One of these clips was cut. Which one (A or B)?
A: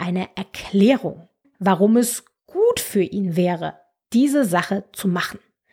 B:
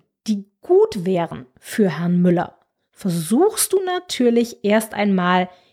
A